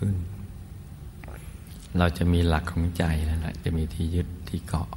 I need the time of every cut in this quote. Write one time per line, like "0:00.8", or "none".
0:03.6

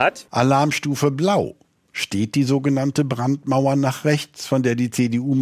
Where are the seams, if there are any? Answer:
none

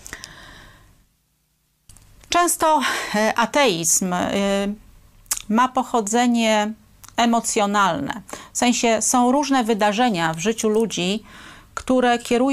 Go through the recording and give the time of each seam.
none

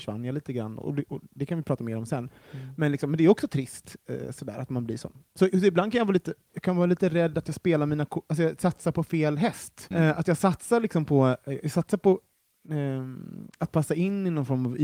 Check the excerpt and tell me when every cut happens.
0:09.9

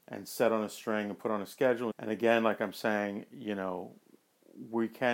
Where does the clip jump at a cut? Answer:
0:01.9

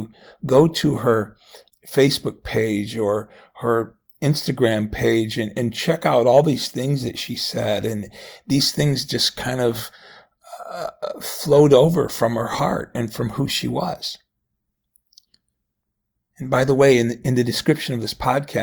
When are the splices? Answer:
none

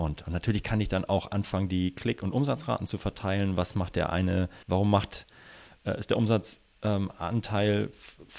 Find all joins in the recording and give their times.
0:04.6

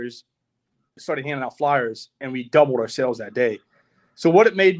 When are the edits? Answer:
0:01.0

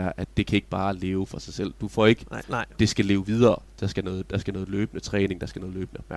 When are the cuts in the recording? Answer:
0:02.4

